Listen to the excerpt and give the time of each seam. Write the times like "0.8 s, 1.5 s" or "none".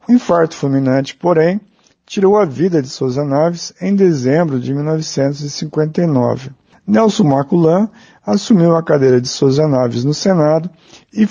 none